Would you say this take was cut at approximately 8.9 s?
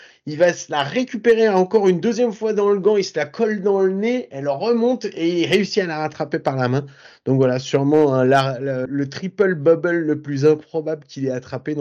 yes; 1 cut; at 8.9 s

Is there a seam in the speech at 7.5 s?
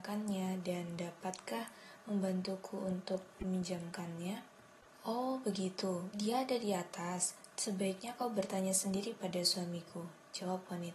no; 1 cut; at 6.1 s

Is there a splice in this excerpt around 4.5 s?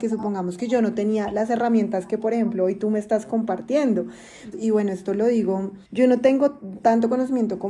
yes; 2 cuts; at 4.5 s, 5.8 s

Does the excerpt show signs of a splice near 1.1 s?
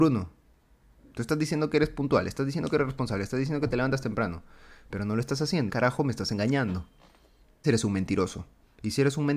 no; 2 cuts; at 5.7 s, 7.6 s

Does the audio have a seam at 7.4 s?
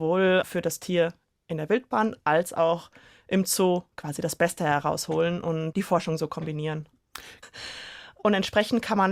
yes; 1 cut; at 7.4 s

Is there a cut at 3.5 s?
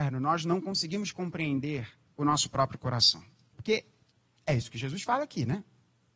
yes; 1 cut; at 3.5 s

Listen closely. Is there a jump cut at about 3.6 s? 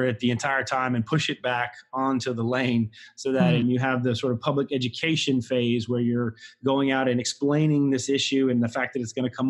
yes; 1 cut; at 3.6 s

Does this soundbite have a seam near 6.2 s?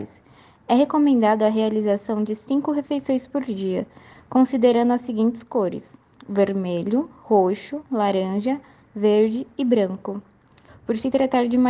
no; 1 cut; at 10.7 s

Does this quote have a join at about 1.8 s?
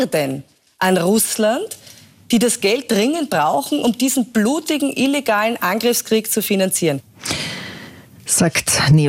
no; 0 cuts

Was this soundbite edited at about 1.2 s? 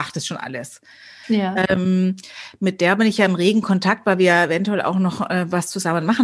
yes; 1 cut; at 1.2 s

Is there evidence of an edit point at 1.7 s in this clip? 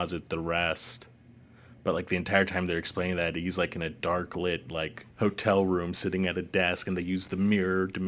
no; 1 cut; at 5.1 s

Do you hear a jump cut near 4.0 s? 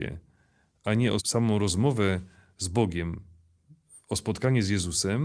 no; 1 cut; at 1.2 s

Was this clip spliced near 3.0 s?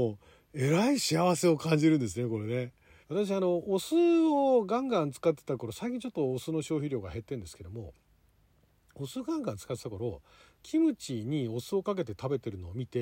yes; 1 cut; at 3.0 s

